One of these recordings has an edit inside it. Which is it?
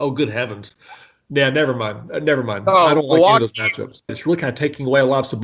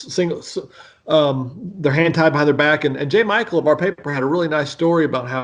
first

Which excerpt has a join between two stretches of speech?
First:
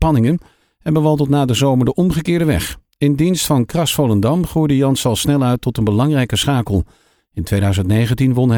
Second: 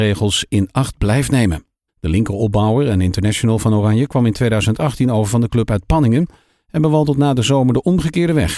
second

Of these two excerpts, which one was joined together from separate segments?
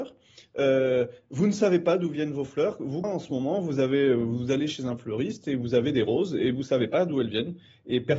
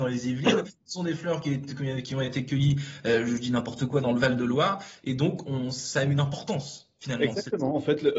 first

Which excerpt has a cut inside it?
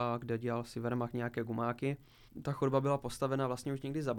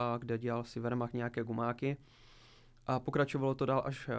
first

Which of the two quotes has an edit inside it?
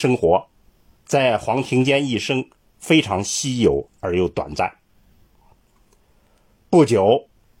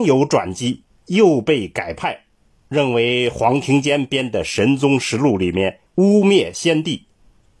second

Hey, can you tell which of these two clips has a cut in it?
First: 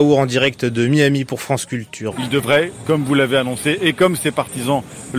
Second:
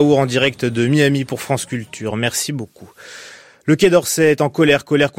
first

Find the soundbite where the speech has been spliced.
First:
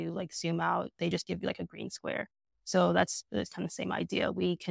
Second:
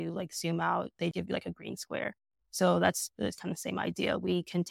second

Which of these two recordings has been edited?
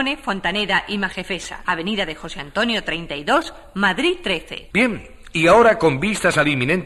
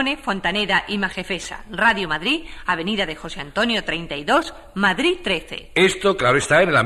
first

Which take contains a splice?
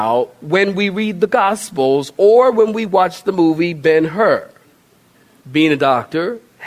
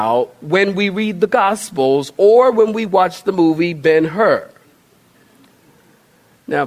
first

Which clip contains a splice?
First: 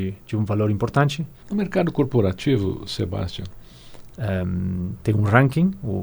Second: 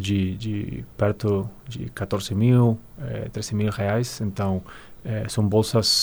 first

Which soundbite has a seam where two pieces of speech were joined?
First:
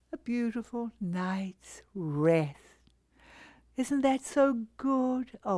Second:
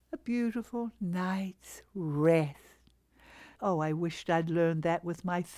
second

